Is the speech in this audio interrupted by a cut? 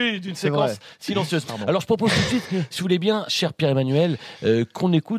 yes; 2 cuts; at 1.4 s, 3.3 s

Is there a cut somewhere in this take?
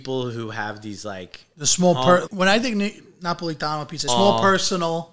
yes; 2 cuts; at 2.3 s, 4.1 s

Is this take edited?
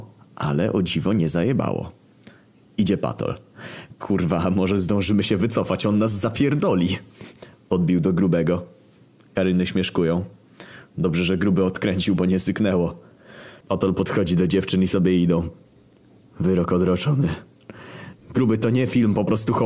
yes; 2 cuts; at 13.6 s, 18.2 s

